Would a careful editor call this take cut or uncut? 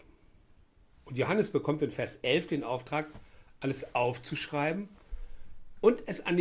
uncut